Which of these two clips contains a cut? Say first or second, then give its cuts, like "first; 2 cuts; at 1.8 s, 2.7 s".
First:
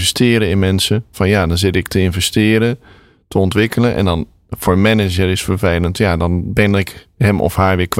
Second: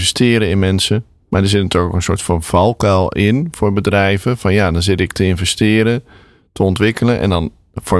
first; 1 cut; at 1.1 s